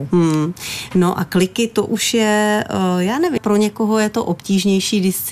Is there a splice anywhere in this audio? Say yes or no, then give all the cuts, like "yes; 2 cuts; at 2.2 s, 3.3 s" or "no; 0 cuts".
yes; 1 cut; at 3.4 s